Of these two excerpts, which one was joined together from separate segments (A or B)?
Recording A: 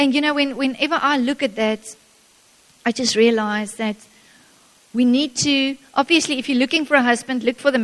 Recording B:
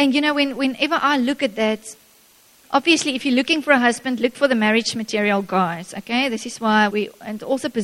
B